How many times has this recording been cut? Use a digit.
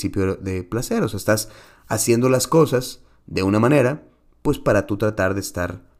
0